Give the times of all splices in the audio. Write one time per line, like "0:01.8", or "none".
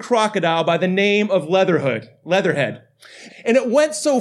0:03.3

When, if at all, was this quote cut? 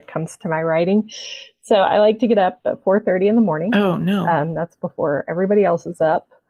none

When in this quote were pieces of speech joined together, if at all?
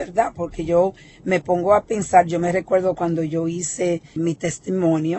0:04.2

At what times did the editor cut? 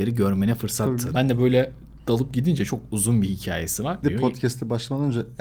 0:01.1
0:04.0

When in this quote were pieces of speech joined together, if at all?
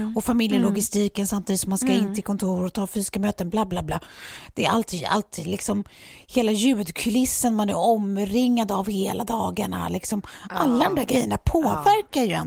none

